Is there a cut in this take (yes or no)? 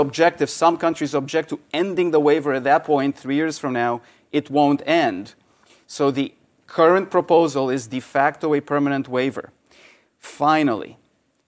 no